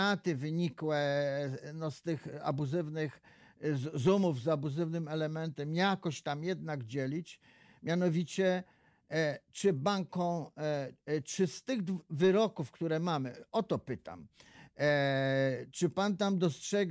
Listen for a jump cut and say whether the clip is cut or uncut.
uncut